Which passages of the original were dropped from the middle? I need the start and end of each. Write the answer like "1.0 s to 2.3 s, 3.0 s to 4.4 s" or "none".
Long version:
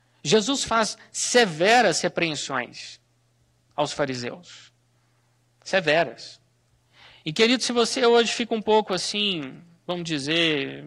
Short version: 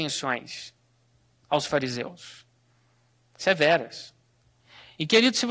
none